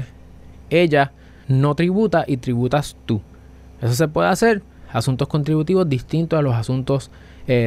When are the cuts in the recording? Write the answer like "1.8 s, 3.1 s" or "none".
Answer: 1.4 s